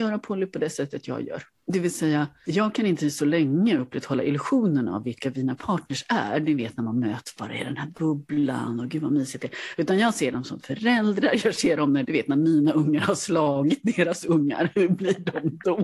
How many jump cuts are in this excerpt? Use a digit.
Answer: 1